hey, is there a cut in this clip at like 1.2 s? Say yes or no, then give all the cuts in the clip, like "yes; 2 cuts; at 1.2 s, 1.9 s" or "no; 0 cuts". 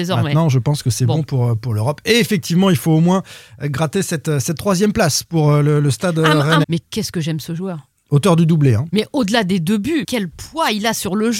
no; 2 cuts; at 6.6 s, 10.0 s